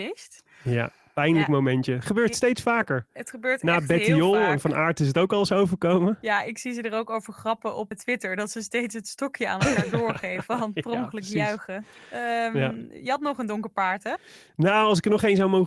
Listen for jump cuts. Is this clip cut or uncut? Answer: cut